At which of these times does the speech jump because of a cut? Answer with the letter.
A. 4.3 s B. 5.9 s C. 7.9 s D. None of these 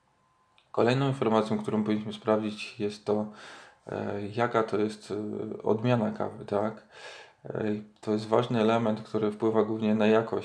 D